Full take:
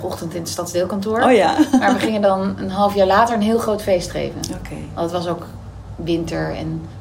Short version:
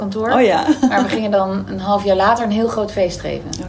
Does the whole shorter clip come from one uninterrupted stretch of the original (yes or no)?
yes